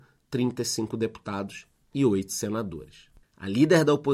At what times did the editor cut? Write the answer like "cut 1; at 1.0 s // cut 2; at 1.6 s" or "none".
cut 1; at 3.2 s